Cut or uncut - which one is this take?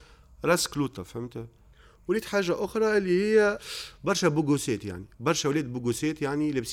uncut